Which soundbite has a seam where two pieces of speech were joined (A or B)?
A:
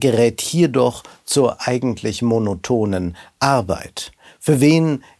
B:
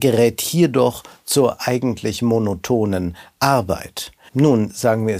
B